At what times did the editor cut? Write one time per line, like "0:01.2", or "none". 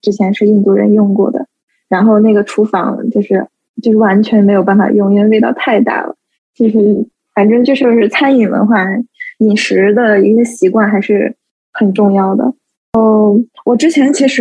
0:06.3